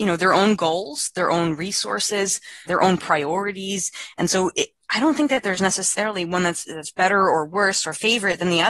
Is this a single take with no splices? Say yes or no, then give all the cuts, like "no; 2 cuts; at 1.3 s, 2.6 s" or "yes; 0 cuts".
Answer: no; 1 cut; at 2.7 s